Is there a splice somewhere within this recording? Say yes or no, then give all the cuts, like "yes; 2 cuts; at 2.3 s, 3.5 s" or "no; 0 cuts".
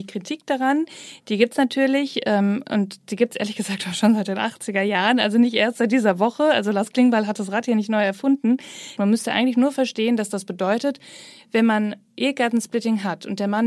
yes; 1 cut; at 9.0 s